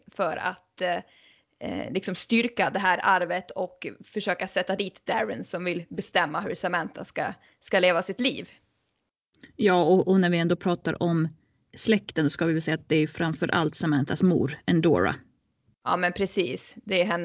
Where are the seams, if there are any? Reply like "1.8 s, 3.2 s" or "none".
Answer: none

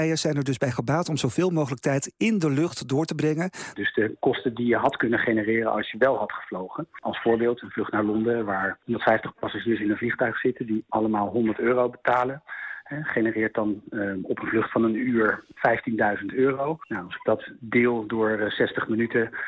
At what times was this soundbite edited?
3.8 s

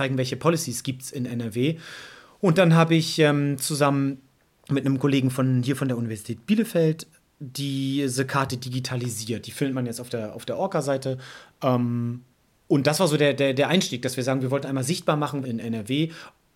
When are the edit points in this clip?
15.4 s

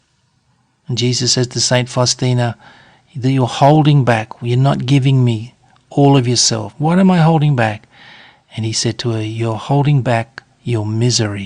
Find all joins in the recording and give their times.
6.7 s

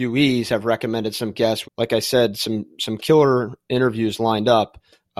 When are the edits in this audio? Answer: 1.6 s

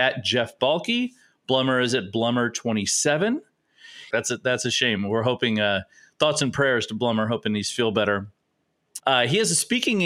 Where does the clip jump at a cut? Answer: 4.1 s, 9.0 s

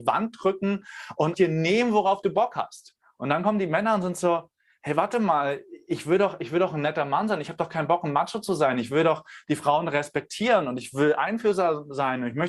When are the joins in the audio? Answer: 1.3 s

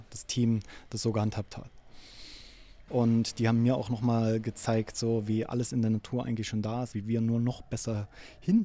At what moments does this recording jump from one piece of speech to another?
2.9 s, 6.9 s

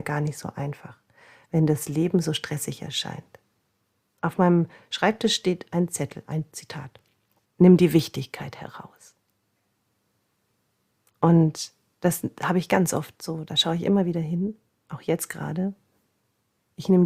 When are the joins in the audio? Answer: 7.5 s

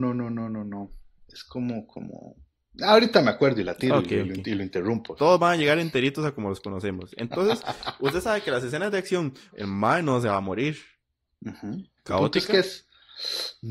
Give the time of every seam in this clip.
5.2 s, 9.5 s, 12.0 s

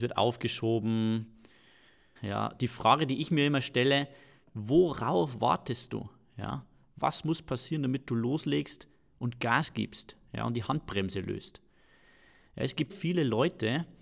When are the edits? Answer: 2.2 s, 12.9 s

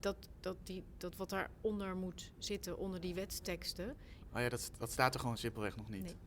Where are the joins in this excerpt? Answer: 4.2 s

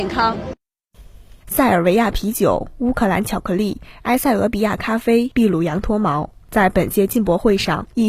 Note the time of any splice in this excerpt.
none

